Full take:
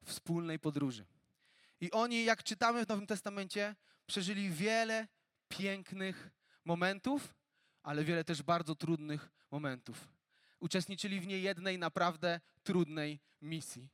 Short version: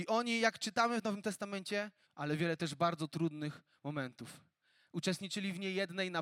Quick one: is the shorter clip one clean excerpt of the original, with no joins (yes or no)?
no